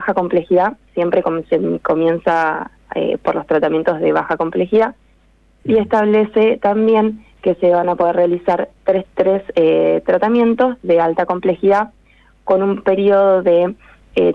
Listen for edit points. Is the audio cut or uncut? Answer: cut